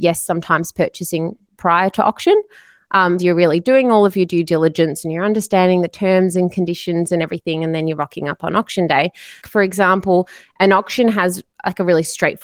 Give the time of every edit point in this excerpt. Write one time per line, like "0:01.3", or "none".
0:03.2
0:09.4